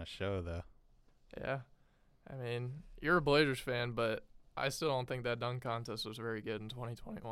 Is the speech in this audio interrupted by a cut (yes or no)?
no